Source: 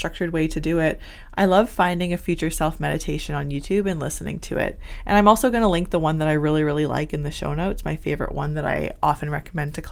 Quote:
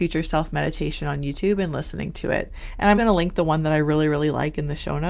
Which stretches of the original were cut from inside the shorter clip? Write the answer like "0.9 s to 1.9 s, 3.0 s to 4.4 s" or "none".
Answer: 5.2 s to 5.5 s